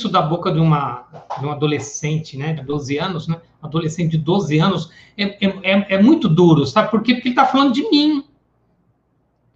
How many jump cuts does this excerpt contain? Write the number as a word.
one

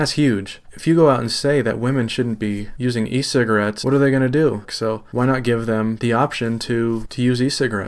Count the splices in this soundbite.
one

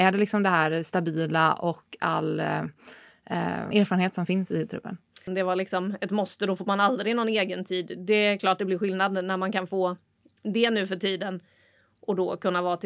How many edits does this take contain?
two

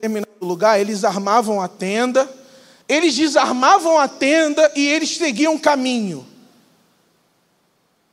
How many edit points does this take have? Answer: one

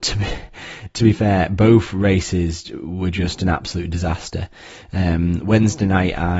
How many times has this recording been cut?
zero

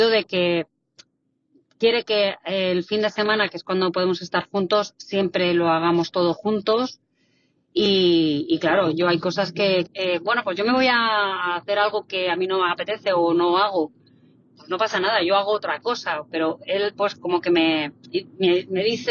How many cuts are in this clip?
one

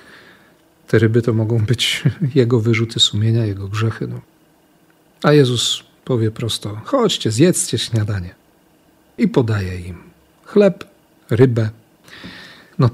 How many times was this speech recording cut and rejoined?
zero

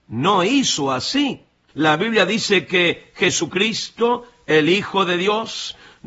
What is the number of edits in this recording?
one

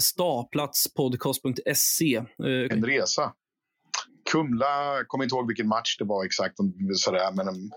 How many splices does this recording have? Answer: two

